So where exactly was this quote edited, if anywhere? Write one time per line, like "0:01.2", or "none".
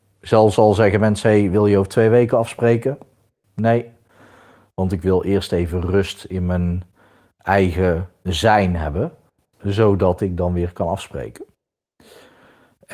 none